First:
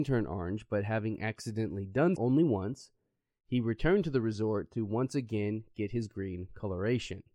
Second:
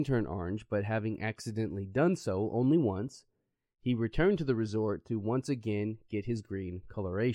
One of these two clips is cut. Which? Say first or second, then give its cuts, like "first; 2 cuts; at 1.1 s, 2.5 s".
first; 1 cut; at 2.2 s